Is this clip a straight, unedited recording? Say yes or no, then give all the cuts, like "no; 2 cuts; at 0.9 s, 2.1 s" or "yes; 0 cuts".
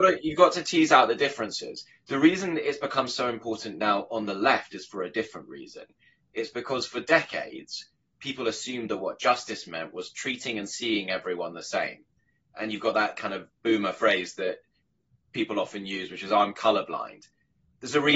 yes; 0 cuts